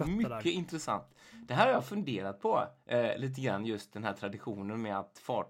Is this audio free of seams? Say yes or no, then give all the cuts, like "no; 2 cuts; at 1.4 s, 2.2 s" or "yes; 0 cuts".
yes; 0 cuts